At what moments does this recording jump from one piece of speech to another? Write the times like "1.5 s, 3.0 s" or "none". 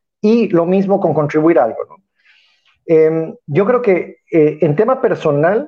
none